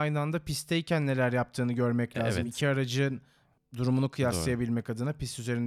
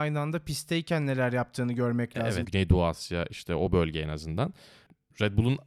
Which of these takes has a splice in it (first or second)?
second